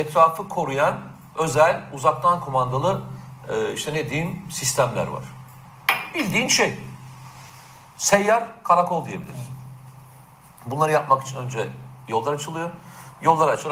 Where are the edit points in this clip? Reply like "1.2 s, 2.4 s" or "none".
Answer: none